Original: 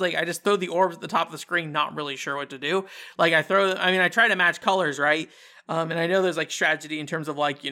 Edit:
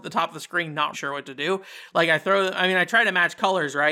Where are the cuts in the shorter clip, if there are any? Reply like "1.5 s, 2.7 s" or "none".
0.9 s